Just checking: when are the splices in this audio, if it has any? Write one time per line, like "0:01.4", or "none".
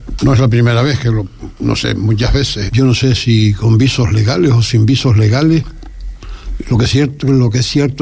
0:02.7